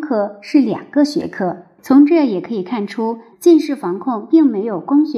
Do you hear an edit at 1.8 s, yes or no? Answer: yes